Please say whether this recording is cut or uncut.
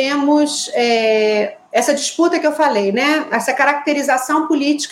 uncut